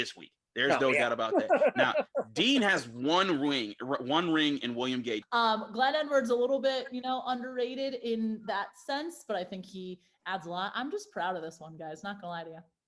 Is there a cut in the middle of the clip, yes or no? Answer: yes